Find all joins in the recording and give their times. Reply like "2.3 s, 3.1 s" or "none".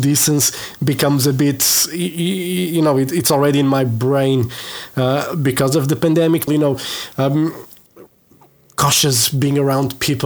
6.5 s

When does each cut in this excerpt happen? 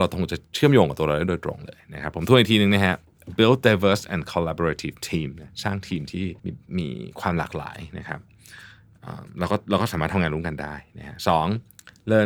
6.4 s

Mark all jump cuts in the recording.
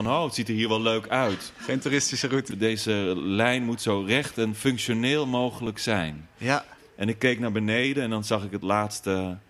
2.5 s, 6.8 s

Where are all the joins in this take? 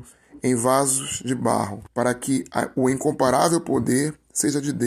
1.9 s

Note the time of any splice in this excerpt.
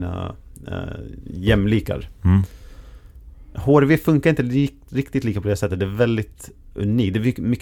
none

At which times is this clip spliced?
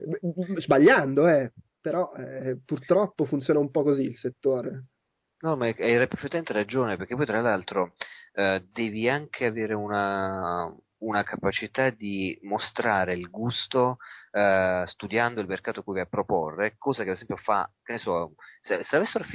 none

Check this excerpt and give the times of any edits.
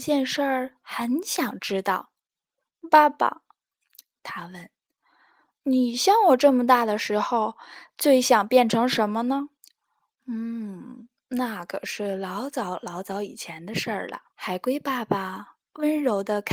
9.6 s, 14.3 s

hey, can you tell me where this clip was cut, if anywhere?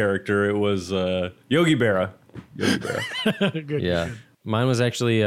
none

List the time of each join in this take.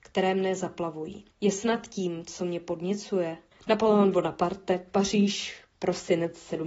1.3 s, 3.5 s

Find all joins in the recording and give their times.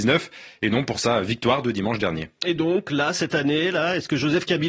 none

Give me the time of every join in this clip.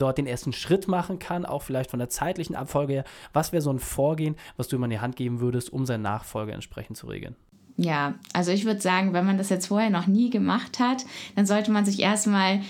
none

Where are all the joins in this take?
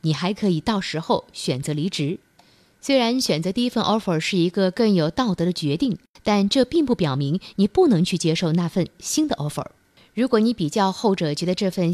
none

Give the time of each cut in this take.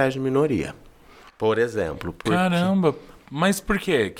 none

